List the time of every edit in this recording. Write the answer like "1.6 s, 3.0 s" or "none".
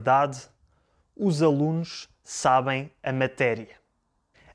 none